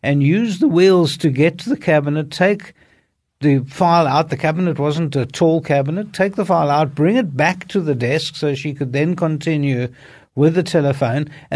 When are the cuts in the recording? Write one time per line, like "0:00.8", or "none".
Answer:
none